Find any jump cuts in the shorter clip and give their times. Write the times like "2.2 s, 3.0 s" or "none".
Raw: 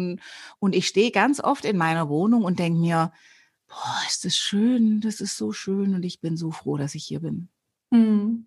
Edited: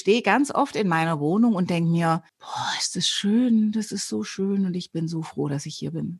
2.3 s